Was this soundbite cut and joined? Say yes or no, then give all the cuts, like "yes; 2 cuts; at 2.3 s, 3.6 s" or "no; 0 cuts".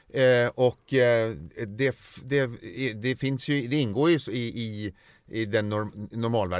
no; 0 cuts